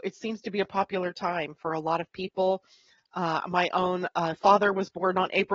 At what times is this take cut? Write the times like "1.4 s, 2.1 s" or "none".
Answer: none